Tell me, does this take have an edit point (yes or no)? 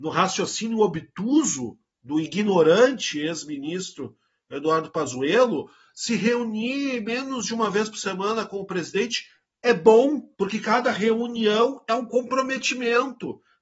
yes